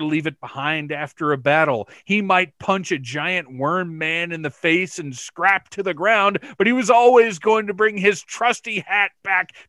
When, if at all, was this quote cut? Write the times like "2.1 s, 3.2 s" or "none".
none